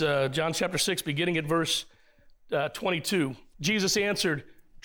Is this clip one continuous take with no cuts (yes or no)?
no